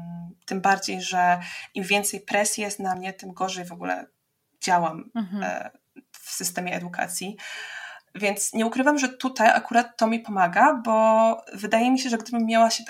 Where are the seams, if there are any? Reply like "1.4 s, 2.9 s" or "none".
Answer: 8.1 s